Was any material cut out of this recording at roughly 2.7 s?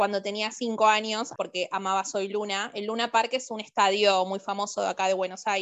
no; 1 cut; at 1.4 s

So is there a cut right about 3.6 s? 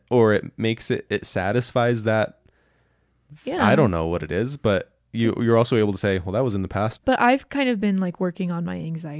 no; 1 cut; at 7.0 s

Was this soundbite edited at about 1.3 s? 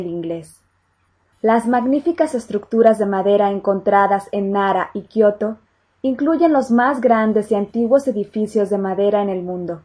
yes; 1 cut; at 1.3 s

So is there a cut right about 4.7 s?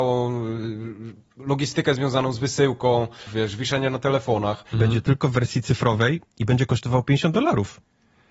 yes; 2 cuts; at 3.3 s, 4.7 s

